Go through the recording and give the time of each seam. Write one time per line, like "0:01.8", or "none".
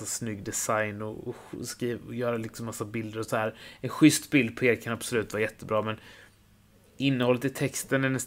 none